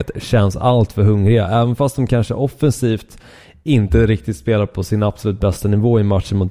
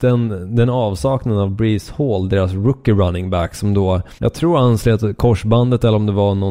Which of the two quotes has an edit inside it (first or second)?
second